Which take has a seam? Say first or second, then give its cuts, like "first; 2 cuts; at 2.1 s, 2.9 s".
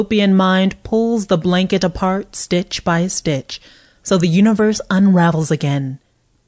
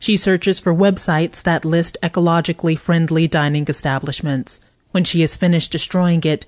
second; 1 cut; at 4.7 s